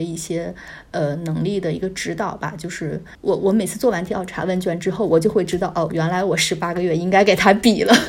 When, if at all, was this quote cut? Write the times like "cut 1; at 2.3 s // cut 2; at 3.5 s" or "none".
none